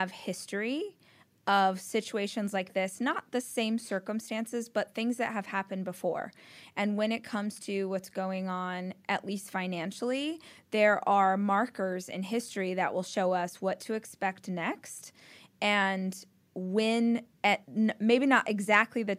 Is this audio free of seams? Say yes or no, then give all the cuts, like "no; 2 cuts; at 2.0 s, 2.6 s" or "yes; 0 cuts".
no; 1 cut; at 17.3 s